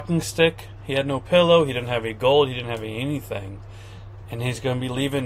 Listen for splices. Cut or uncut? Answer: uncut